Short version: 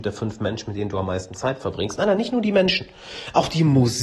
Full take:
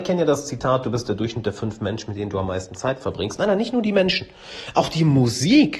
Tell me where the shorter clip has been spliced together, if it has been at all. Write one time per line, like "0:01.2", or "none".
none